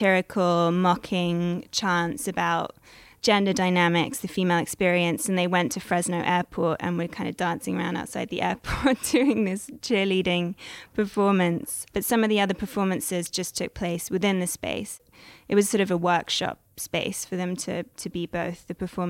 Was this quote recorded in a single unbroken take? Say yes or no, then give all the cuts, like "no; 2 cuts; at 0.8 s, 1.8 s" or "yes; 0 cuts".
yes; 0 cuts